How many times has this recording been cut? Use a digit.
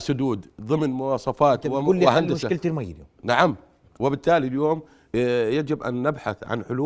1